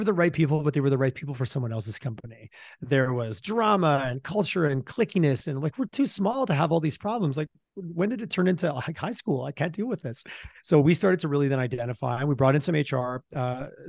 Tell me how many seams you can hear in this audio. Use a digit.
0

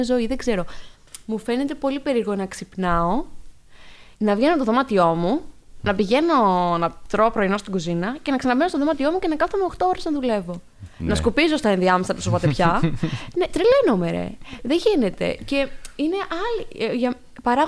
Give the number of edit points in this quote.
1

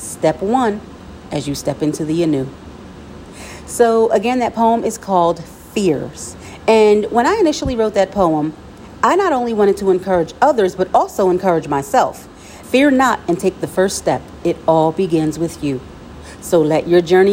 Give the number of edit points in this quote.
1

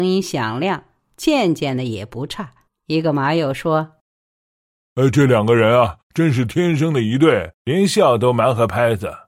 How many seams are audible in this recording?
1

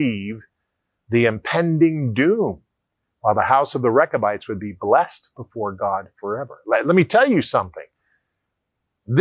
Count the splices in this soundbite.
0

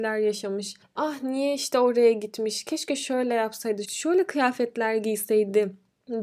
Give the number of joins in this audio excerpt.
1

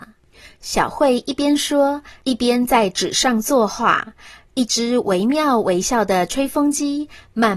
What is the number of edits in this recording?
0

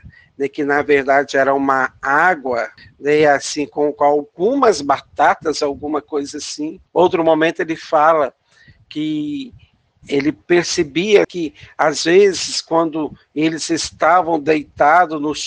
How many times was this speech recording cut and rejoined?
2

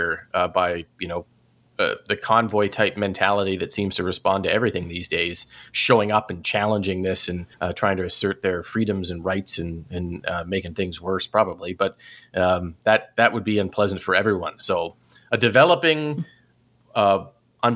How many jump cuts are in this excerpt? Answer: 1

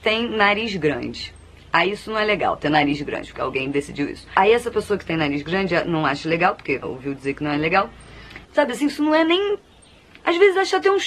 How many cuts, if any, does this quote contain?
2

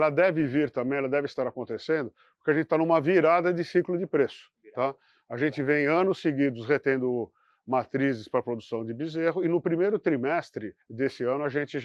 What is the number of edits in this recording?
1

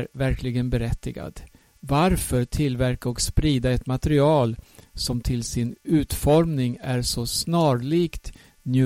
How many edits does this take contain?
0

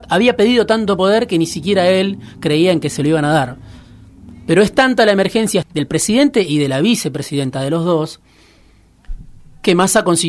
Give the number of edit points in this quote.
1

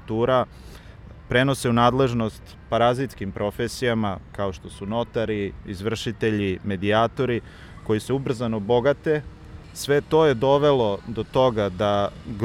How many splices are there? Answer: 0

